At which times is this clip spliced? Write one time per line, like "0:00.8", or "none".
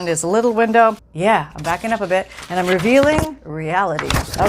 0:01.0